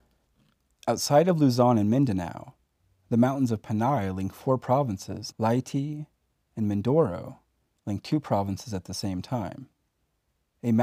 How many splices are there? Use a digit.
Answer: 1